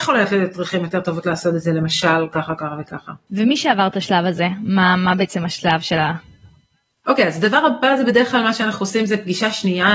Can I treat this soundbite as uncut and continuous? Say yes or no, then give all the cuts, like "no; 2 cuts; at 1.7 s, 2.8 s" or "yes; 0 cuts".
yes; 0 cuts